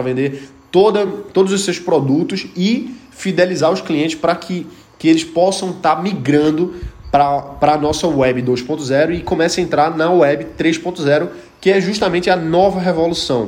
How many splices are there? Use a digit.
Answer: 0